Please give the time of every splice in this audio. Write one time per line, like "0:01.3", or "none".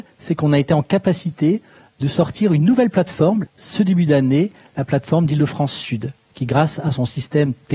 0:03.5